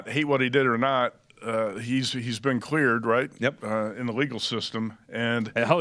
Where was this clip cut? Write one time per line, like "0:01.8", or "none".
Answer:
none